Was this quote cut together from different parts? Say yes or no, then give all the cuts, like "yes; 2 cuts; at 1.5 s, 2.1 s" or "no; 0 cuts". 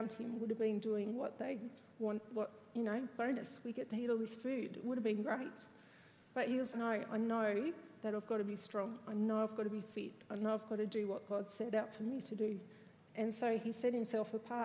yes; 1 cut; at 6.7 s